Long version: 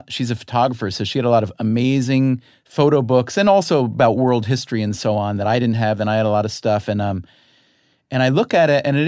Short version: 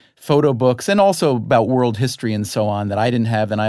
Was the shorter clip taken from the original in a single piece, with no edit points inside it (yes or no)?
yes